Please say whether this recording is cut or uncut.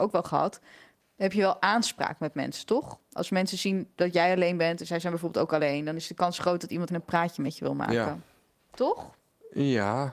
cut